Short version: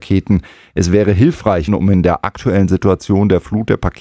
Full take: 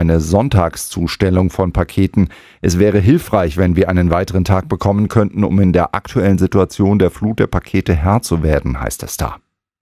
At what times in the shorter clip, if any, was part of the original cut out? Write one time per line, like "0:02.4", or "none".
0:01.7